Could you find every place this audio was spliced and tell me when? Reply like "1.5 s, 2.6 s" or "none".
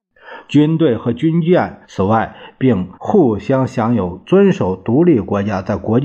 1.8 s, 2.9 s